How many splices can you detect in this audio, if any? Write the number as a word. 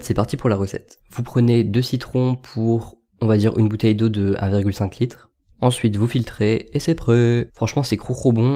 one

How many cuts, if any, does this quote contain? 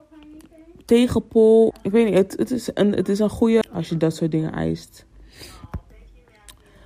two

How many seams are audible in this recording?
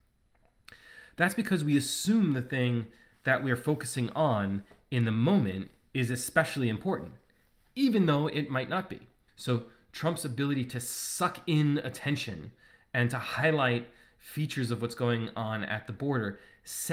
one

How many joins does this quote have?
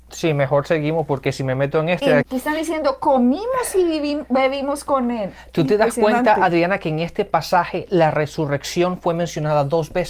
one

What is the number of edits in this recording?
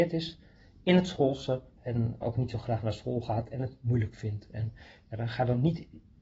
one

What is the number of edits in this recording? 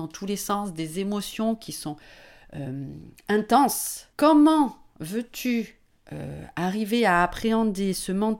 one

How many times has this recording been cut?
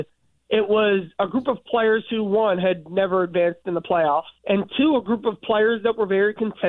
one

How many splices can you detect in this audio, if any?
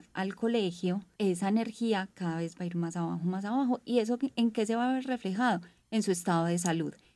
one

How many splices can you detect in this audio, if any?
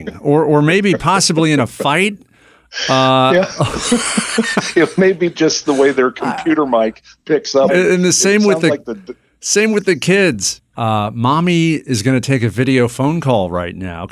two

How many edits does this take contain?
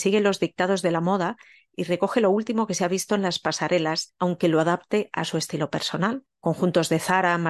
one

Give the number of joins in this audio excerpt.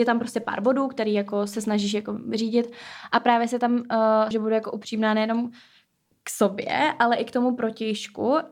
one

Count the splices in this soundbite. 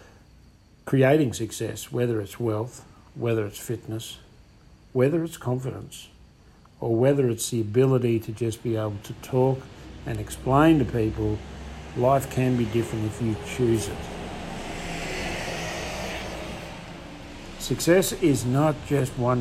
zero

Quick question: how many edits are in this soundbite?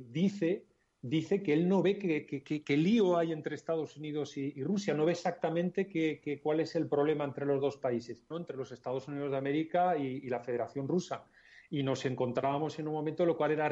one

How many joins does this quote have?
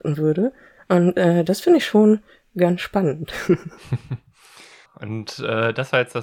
one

